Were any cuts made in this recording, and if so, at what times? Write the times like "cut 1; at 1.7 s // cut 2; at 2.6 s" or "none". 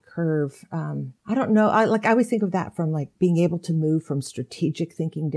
cut 1; at 3.2 s